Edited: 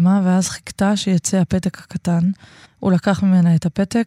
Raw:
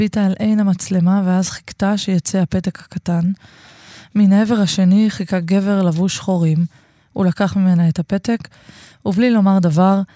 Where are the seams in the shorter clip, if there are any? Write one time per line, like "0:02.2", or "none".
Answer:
0:02.6

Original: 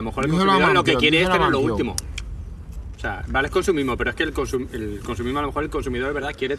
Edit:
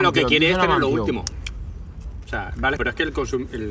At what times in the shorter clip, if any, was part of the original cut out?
0:02.8

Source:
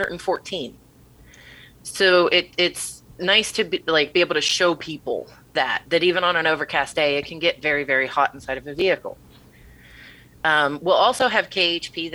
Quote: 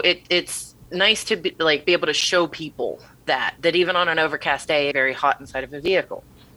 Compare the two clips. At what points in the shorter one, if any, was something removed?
0:04.9

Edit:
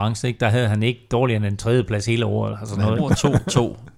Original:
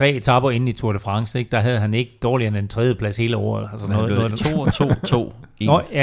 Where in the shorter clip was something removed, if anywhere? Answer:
0:03.0

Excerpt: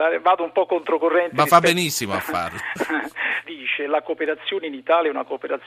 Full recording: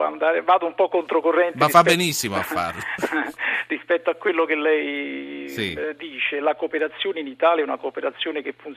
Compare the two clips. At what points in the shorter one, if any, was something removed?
0:03.4

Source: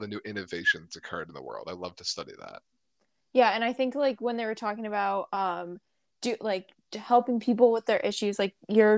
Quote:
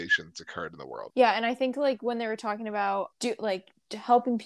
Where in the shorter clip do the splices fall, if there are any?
0:01.1
0:03.1

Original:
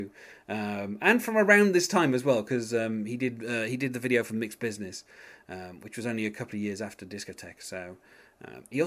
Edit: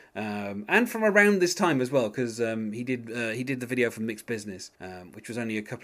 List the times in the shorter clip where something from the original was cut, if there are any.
0:04.7

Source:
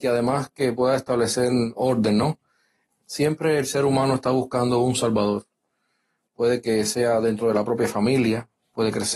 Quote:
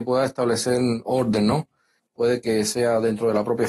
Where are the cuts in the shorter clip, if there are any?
0:02.0

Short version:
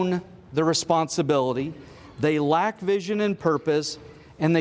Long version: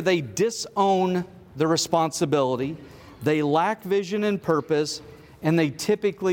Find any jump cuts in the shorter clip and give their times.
none

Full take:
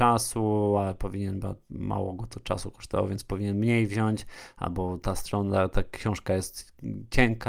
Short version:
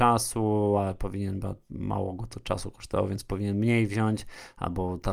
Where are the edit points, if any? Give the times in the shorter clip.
none

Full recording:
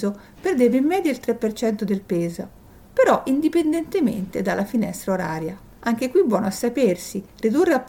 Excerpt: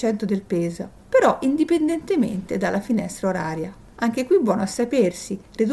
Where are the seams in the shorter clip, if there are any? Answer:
0:01.0

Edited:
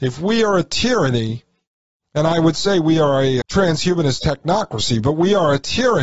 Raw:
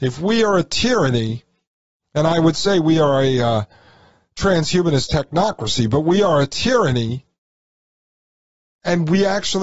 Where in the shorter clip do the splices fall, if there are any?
0:03.4

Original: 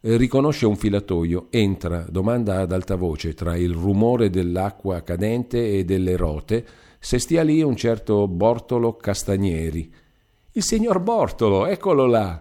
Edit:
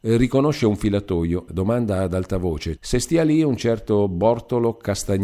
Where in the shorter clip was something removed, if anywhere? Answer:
0:01.5
0:02.8

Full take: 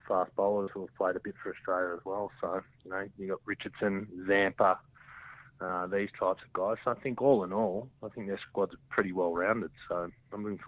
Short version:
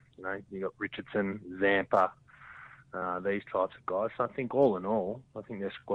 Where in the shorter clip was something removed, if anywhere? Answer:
none

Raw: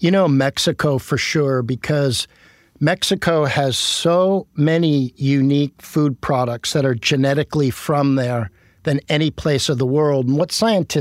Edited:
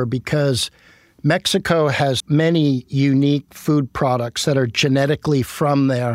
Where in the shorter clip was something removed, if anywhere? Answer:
0:02.2

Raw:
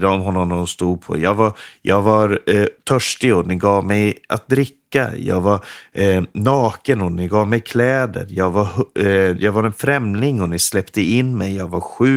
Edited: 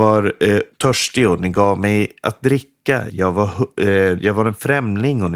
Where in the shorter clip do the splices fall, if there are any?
0:03.1

